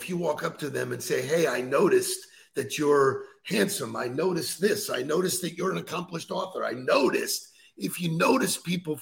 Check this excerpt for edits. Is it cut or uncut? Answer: uncut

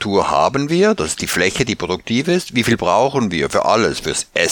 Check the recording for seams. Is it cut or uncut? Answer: uncut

